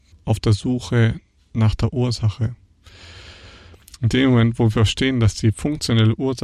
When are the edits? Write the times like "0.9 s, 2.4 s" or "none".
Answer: none